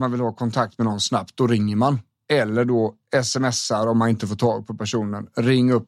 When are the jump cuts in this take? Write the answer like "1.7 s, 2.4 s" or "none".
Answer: none